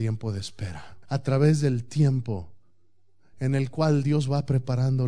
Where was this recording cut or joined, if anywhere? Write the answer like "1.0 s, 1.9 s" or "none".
1.0 s